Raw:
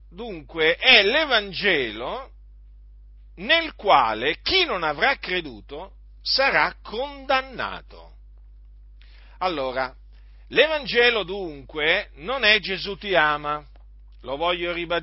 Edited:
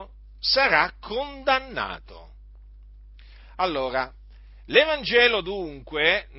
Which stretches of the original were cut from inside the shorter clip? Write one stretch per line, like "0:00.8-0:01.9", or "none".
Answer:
none